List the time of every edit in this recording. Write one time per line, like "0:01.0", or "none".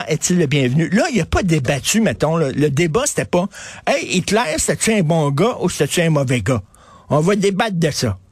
none